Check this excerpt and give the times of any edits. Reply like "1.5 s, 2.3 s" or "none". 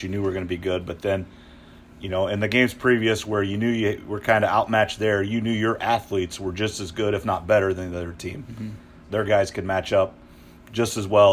9.0 s